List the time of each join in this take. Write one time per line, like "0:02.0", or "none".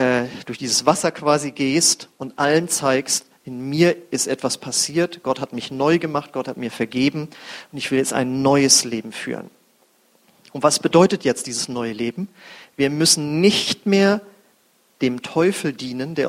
none